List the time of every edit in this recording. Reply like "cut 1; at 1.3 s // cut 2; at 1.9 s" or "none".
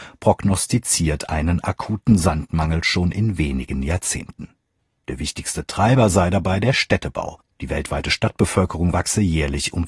none